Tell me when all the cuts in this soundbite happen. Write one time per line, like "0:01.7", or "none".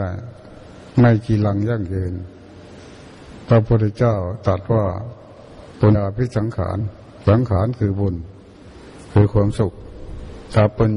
0:05.9

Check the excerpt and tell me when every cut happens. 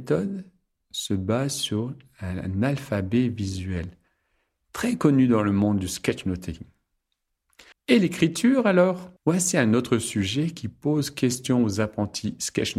0:07.7
0:09.2

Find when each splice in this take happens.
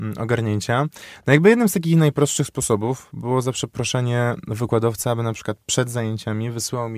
none

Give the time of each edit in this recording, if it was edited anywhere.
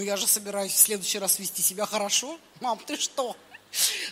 none

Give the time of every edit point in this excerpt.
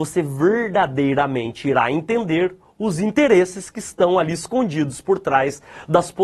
none

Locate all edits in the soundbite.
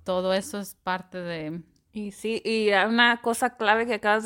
none

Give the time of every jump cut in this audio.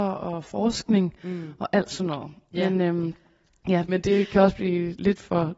0:03.9

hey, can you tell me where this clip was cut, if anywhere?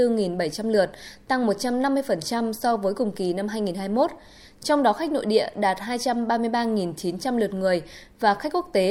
none

